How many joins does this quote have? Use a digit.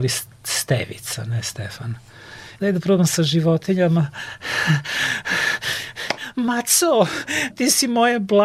2